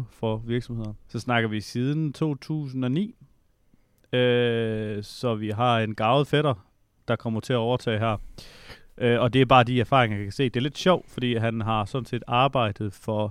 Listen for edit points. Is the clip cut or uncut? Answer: cut